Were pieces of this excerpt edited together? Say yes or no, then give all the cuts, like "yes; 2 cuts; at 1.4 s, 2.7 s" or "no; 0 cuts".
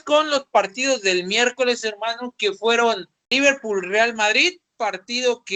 no; 0 cuts